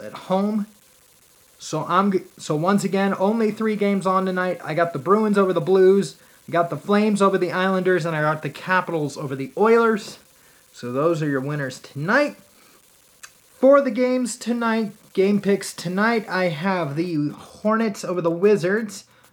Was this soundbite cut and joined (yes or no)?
yes